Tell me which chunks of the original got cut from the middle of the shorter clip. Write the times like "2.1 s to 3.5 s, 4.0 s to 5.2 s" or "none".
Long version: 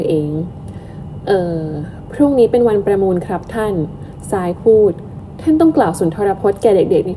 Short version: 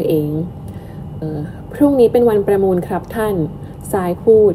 1.2 s to 1.6 s